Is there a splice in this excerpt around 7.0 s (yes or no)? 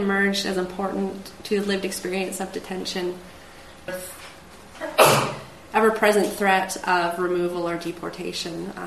no